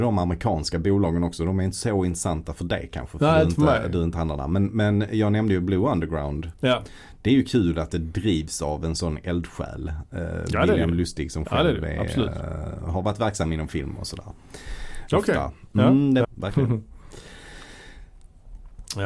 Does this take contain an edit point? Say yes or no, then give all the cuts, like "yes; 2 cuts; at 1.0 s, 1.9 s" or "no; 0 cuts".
yes; 2 cuts; at 15.1 s, 16.2 s